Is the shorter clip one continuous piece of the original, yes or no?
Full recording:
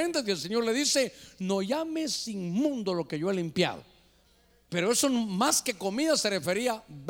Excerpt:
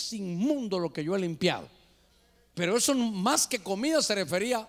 yes